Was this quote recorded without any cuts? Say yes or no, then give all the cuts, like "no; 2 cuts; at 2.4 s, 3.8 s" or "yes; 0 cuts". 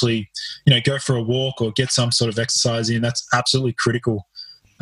yes; 0 cuts